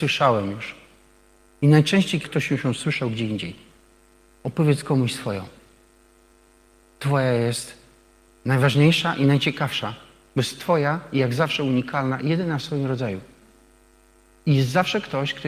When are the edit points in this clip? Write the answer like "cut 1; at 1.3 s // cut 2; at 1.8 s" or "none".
cut 1; at 2.2 s